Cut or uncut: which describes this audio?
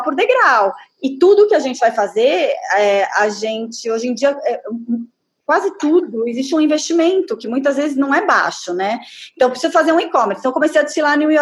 uncut